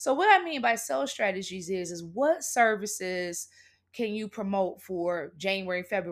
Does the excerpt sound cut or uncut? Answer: uncut